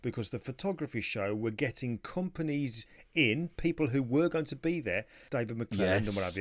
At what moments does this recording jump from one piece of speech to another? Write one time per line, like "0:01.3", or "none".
0:05.3